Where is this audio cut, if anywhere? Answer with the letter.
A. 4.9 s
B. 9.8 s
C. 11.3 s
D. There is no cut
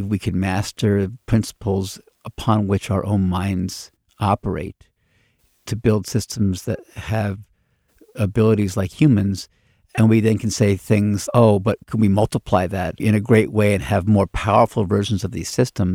C